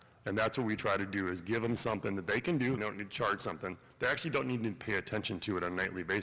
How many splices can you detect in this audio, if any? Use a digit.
1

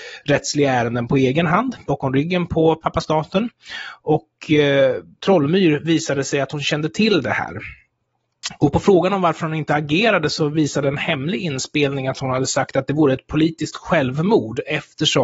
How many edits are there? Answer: 0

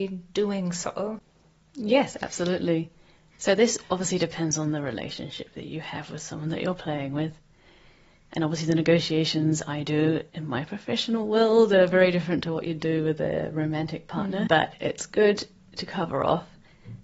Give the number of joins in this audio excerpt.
1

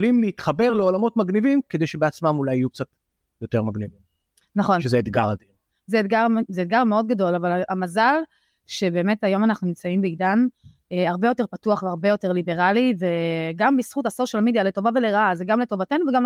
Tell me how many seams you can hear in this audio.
1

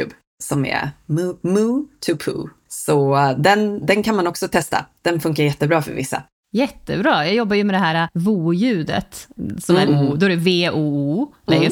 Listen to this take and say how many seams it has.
1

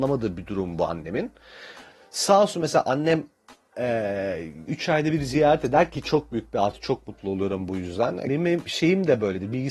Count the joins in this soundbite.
2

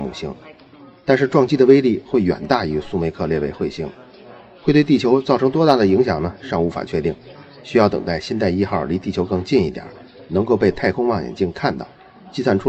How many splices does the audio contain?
0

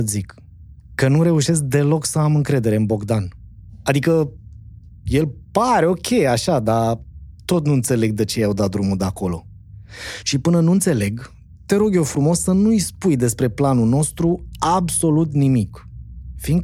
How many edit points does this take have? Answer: 0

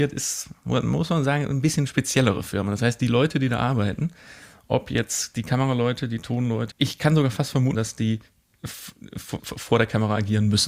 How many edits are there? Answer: 3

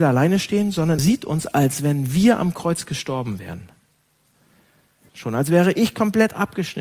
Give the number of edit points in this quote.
2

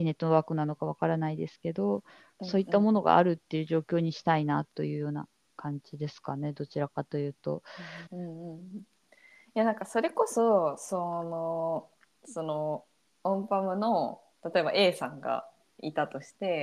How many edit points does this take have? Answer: 1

